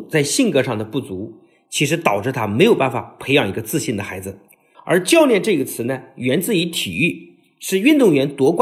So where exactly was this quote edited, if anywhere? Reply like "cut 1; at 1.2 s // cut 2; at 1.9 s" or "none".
cut 1; at 4.7 s

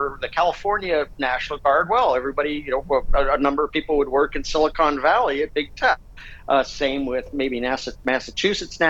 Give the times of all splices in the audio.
cut 1; at 6.6 s

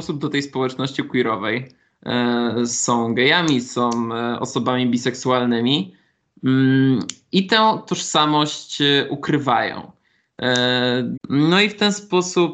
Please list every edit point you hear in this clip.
cut 1; at 11.1 s

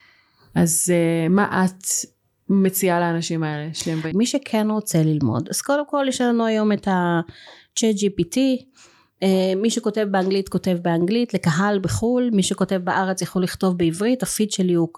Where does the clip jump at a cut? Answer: cut 1; at 4.1 s

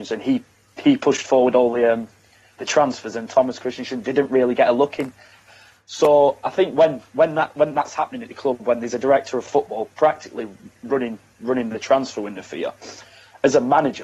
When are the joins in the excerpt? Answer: none

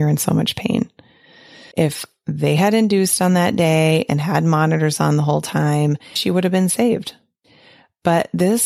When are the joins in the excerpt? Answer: cut 1; at 1.7 s // cut 2; at 6.2 s

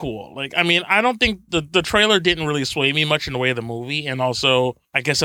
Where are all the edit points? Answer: none

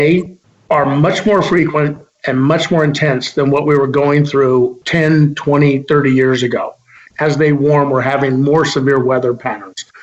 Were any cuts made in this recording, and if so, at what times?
cut 1; at 4.8 s // cut 2; at 7.1 s

